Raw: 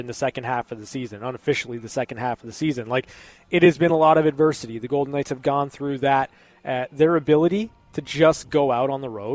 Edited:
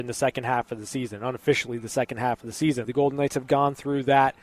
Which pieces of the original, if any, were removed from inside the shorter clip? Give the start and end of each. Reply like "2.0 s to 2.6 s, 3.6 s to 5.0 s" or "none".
2.8 s to 4.8 s